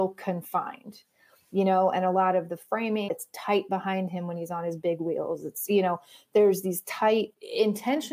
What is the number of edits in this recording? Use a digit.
1